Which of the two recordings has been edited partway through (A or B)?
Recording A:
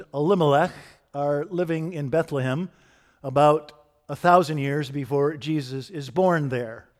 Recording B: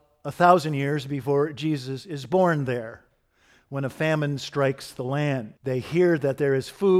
B